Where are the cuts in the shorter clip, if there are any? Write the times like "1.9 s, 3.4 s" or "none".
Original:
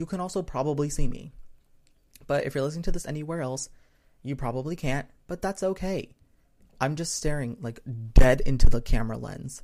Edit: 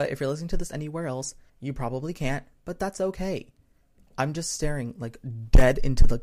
1.5 s